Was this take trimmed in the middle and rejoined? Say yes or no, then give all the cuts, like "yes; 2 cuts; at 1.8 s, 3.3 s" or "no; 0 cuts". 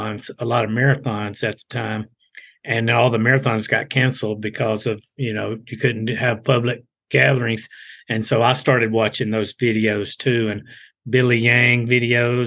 no; 0 cuts